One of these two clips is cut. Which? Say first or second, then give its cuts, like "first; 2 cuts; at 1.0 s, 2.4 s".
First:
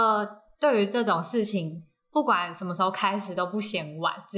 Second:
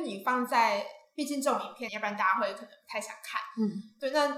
second; 1 cut; at 1.9 s